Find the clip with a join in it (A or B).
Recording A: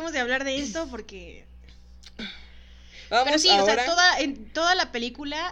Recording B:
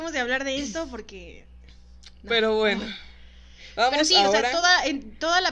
A